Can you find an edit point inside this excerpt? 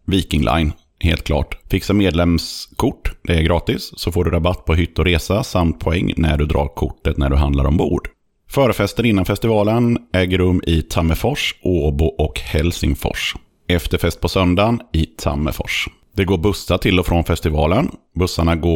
no; 0 cuts

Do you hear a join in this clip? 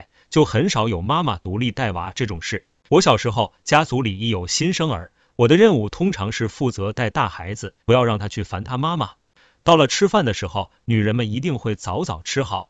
yes; 3 cuts; at 2.9 s, 5.3 s, 7.8 s

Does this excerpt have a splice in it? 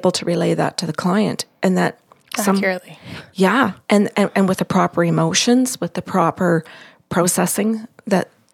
no; 0 cuts

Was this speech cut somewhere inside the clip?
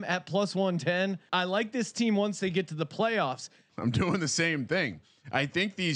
yes; 2 cuts; at 1.3 s, 3.7 s

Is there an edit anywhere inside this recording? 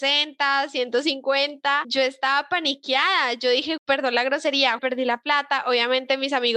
yes; 2 cuts; at 3.8 s, 4.8 s

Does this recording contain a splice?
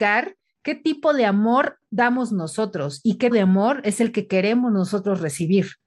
yes; 2 cuts; at 1.9 s, 3.3 s

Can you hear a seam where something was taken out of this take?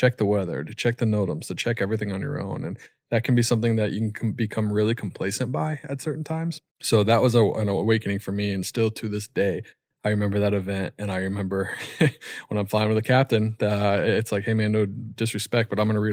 yes; 1 cut; at 6.7 s

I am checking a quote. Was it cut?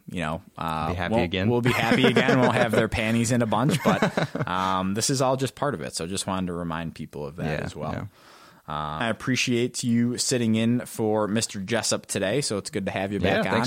yes; 1 cut; at 9.0 s

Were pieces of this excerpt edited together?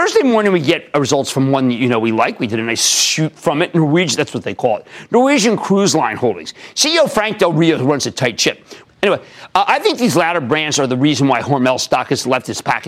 yes; 1 cut; at 8.8 s

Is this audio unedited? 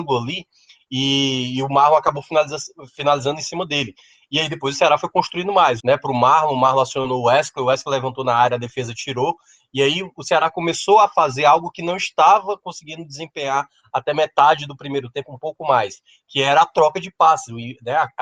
no; 1 cut; at 5.8 s

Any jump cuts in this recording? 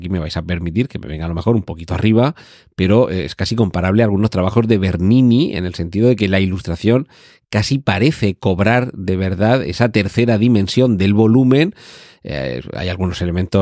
no; 0 cuts

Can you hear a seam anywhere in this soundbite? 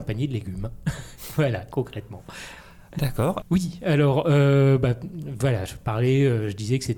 yes; 1 cut; at 3.4 s

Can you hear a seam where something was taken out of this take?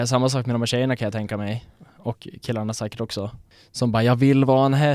no; 0 cuts

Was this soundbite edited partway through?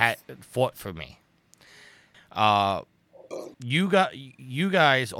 yes; 2 cuts; at 2.1 s, 3.5 s

